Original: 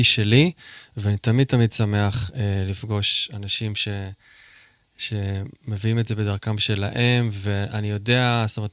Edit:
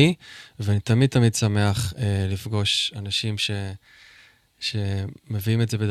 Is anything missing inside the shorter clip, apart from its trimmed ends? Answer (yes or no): no